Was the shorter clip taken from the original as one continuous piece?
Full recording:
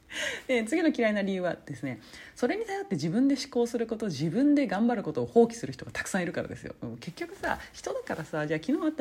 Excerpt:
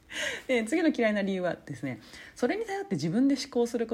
yes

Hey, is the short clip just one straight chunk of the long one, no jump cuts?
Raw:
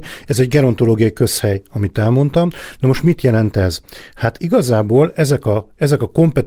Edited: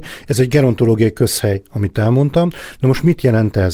yes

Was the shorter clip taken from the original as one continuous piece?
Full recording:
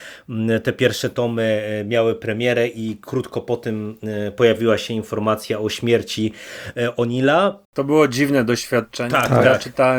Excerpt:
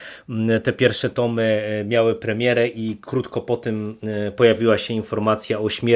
yes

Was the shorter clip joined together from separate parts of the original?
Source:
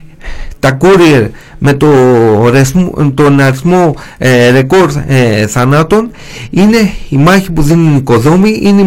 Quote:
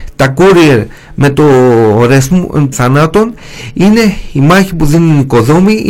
yes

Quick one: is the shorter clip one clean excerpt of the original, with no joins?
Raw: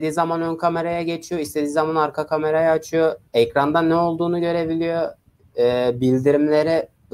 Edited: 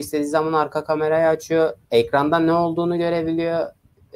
yes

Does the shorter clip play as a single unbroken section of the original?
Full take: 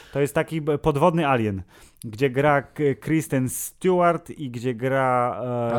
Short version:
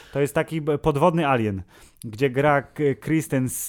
yes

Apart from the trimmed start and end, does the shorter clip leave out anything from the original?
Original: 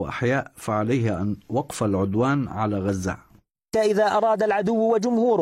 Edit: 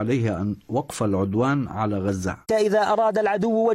yes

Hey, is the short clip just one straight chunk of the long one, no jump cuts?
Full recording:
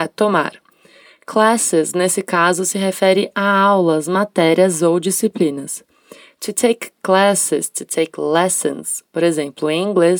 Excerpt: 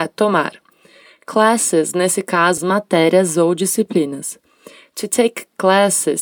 no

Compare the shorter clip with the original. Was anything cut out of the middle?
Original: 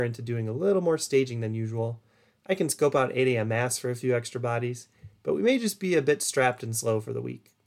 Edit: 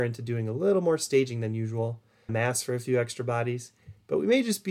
yes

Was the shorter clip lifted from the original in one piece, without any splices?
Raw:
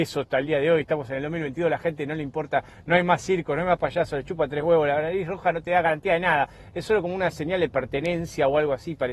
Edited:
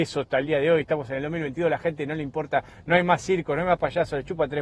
yes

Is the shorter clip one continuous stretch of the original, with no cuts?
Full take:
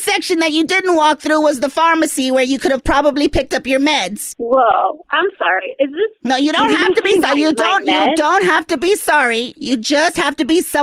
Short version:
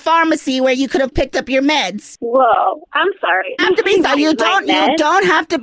no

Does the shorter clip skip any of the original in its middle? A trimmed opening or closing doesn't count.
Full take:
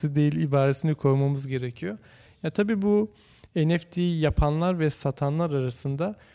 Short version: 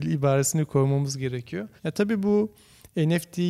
yes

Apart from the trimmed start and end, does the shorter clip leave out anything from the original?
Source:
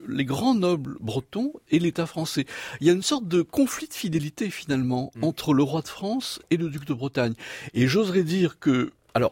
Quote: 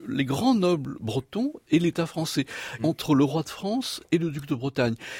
yes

